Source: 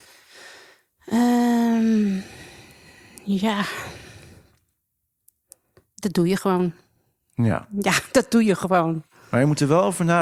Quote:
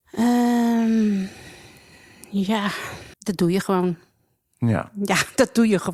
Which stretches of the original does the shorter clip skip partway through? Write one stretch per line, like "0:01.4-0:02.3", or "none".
0:04.1-0:05.9